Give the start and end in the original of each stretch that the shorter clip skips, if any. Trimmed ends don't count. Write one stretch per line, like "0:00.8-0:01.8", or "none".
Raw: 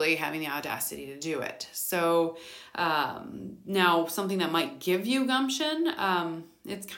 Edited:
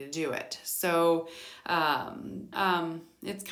0:03.6-0:06.0